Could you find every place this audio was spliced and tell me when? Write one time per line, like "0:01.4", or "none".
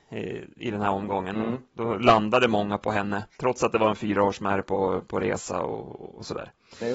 0:03.3